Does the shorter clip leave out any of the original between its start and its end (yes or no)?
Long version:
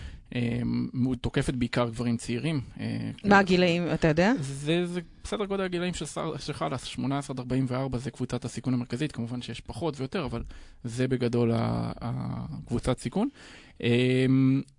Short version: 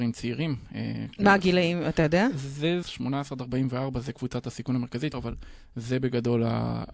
yes